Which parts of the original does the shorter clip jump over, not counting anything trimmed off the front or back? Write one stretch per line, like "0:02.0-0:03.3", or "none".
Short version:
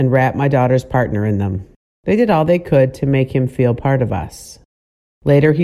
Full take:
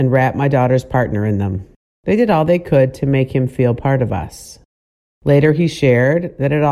none